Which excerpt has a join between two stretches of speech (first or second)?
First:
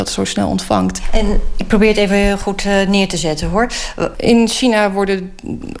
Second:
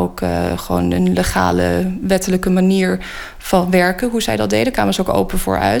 first